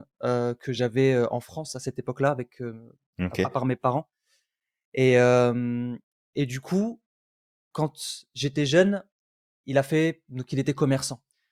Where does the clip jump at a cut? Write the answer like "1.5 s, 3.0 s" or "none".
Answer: none